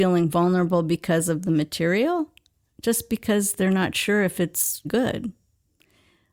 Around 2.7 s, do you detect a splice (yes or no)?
no